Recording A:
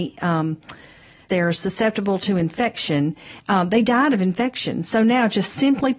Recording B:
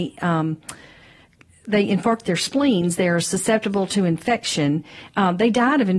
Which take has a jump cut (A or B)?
A